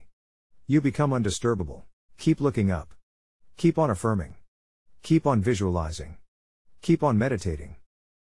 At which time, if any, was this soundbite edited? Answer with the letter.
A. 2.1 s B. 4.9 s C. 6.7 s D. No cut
A